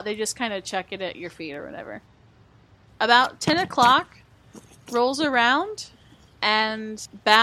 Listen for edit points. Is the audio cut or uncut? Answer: uncut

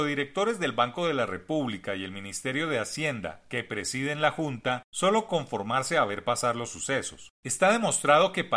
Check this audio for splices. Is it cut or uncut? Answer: cut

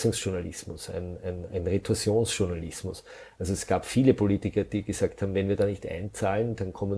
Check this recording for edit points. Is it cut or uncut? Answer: uncut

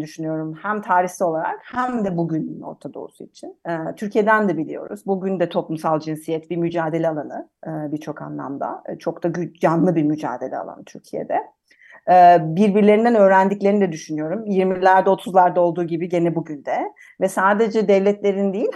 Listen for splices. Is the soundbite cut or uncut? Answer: uncut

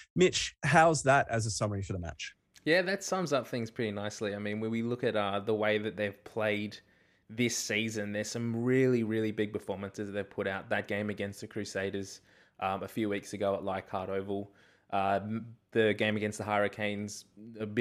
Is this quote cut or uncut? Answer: uncut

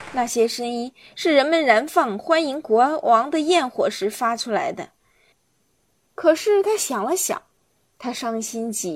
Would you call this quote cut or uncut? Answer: cut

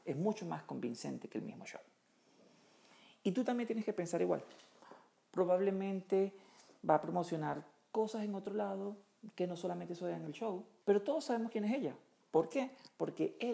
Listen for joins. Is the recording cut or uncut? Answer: cut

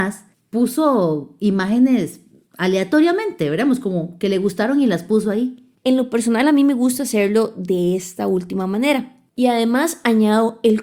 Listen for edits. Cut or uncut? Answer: cut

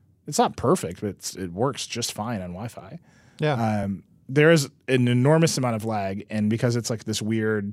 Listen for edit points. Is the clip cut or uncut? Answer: uncut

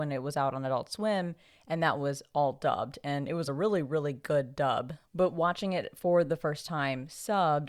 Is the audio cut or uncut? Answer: uncut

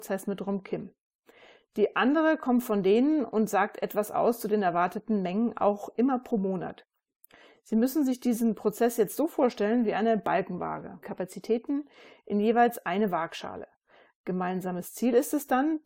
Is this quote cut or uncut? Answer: cut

